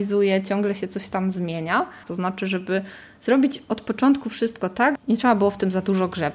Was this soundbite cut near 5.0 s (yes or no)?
yes